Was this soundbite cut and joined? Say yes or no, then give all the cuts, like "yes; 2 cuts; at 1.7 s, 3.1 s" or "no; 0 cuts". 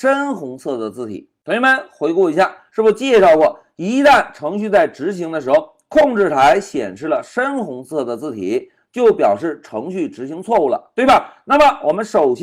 yes; 1 cut; at 2.7 s